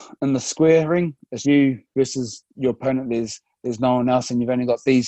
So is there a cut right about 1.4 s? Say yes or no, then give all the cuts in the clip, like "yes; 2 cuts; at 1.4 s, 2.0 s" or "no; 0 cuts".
yes; 1 cut; at 1.4 s